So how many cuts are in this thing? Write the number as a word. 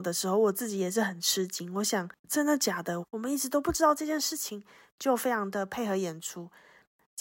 one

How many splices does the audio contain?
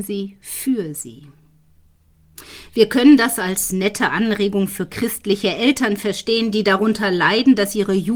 zero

